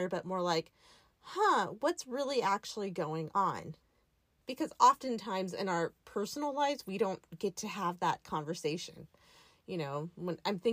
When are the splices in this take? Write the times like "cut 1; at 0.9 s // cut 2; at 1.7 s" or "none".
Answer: cut 1; at 4.4 s